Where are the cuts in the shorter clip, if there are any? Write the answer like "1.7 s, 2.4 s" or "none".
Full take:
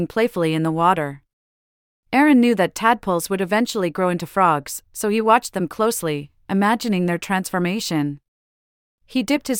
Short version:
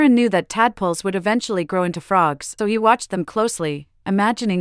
2.6 s